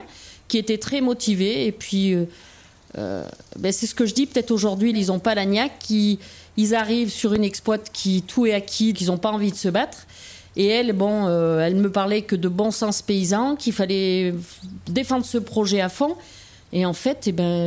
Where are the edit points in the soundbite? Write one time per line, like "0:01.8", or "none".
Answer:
0:04.9
0:08.9